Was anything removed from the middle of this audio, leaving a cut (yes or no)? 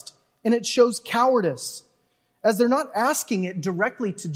no